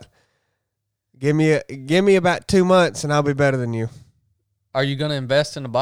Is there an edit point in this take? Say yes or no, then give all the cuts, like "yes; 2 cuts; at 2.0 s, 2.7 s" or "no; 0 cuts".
no; 0 cuts